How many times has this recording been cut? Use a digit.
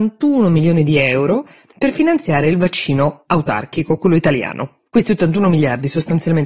0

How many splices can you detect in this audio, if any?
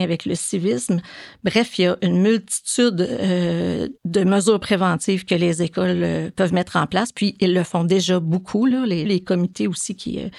2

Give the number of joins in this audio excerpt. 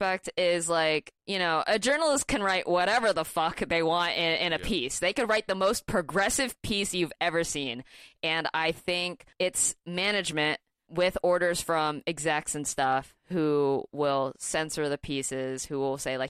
1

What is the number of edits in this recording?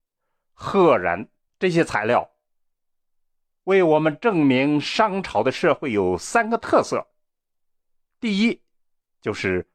1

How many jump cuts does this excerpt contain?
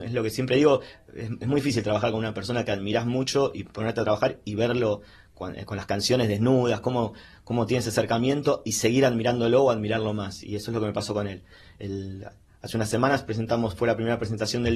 0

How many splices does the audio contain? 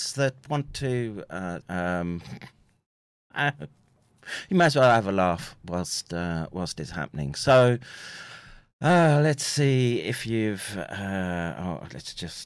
1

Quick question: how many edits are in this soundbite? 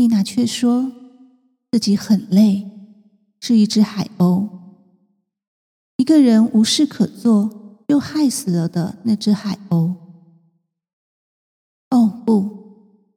1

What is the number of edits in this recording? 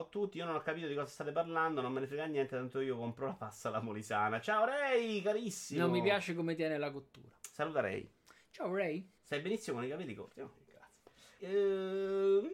2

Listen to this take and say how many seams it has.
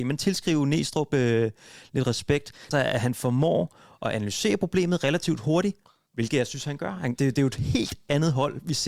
3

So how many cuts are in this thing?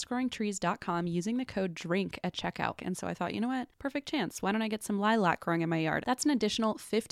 2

